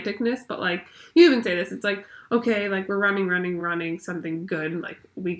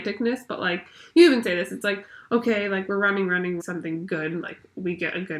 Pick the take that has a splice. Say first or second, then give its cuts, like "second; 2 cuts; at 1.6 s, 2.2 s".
second; 1 cut; at 3.6 s